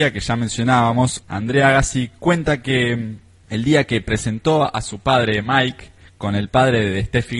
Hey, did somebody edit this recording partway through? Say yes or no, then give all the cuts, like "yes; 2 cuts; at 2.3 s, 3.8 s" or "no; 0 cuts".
yes; 1 cut; at 1.2 s